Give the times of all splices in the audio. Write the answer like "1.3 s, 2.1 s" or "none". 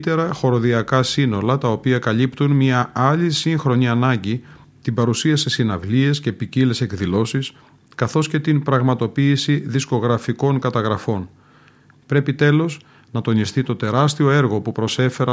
11.9 s